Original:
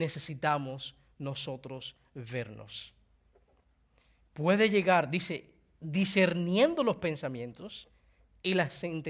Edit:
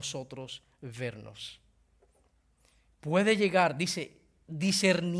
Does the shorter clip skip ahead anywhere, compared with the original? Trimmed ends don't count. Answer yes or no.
no